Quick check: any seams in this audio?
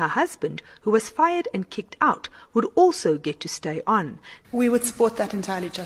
yes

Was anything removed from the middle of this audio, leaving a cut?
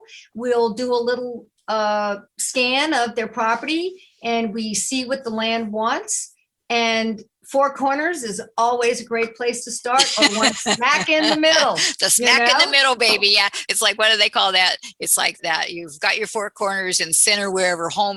yes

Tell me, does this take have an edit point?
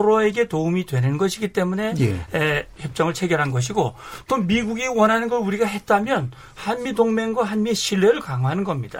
yes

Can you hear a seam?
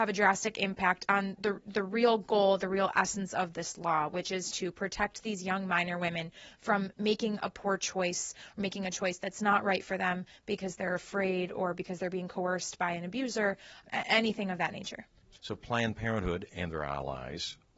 no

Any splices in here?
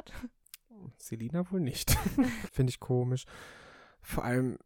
yes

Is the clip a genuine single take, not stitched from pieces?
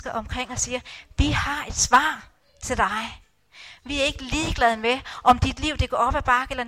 yes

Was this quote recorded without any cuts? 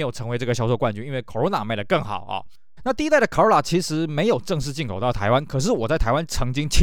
no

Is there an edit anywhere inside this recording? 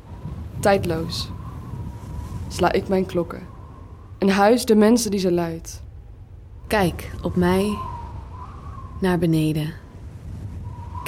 yes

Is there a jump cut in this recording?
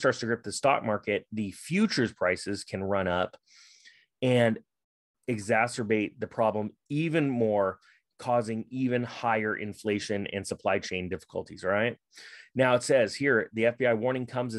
no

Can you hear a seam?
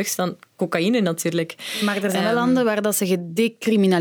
no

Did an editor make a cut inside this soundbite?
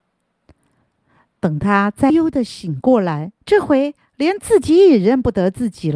yes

